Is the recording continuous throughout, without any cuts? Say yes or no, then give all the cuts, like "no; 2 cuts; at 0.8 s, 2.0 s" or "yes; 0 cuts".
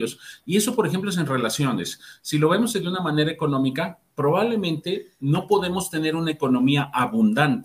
yes; 0 cuts